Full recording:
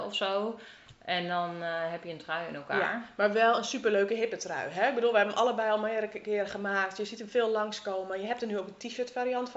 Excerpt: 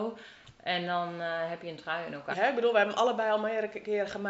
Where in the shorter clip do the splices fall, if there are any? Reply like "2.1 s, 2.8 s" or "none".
2.3 s